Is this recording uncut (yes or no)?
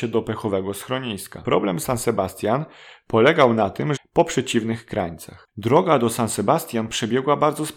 no